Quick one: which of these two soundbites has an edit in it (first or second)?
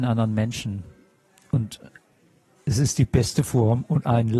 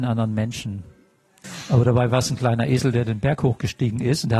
second